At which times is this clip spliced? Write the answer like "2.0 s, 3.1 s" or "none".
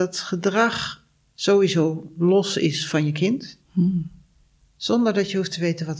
3.6 s